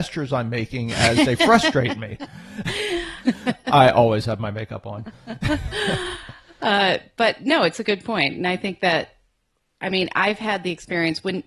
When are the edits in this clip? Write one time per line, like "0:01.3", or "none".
0:03.3